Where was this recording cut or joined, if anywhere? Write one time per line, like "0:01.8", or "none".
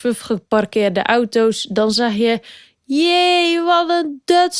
none